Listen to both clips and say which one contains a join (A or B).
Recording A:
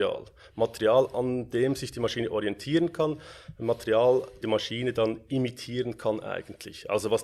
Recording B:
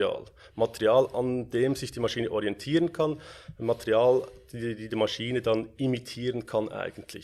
A